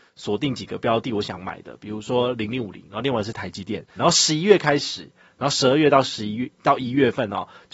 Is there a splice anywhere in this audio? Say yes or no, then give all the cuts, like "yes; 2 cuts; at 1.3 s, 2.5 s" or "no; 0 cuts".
yes; 1 cut; at 4.0 s